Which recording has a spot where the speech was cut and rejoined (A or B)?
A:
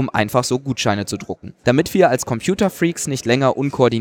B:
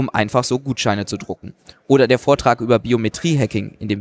A